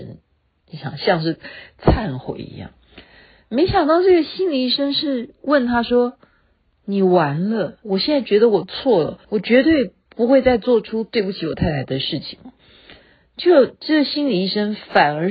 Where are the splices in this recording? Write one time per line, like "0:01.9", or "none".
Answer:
0:07.8
0:09.2